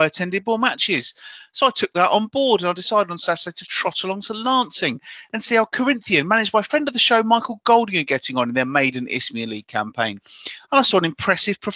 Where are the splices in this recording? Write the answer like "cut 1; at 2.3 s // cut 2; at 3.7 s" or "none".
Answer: none